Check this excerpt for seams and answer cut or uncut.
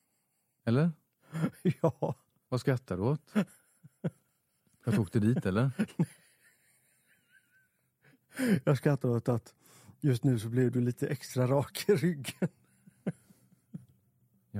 uncut